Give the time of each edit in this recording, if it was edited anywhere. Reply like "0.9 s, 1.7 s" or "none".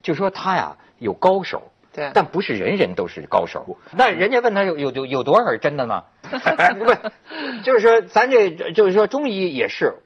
3.9 s, 6.2 s

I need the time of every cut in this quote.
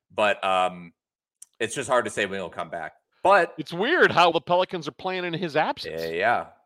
4.3 s

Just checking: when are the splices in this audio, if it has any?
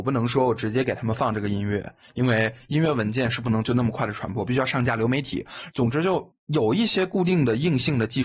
5.7 s

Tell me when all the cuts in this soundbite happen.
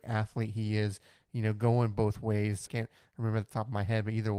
2.7 s

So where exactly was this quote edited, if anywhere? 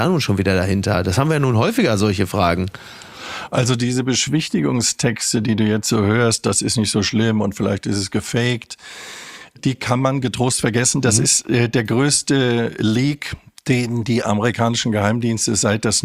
none

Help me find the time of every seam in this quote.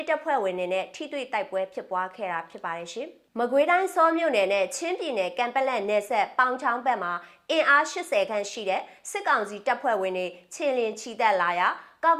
none

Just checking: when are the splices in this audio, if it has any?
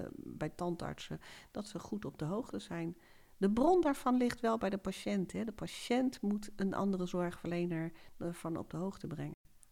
none

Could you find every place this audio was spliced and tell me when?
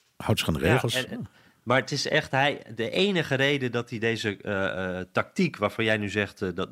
none

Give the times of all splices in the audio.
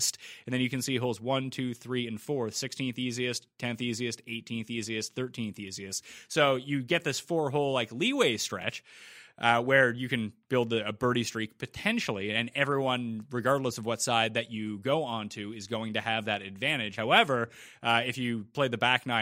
none

